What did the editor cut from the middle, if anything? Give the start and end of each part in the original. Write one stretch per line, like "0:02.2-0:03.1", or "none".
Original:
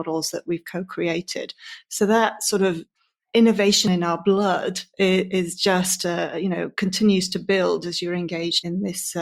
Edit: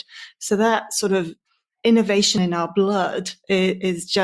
none